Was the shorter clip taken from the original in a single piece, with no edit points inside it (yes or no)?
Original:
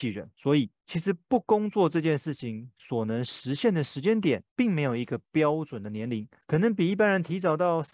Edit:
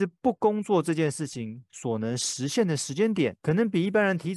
no